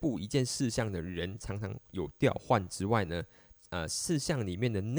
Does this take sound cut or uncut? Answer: uncut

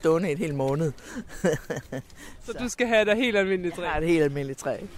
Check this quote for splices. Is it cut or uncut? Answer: uncut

